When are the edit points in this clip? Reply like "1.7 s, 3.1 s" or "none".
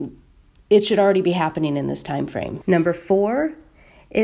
2.6 s